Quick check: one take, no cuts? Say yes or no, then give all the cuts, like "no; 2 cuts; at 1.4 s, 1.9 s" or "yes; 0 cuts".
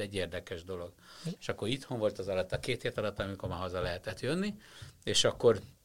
no; 1 cut; at 1.4 s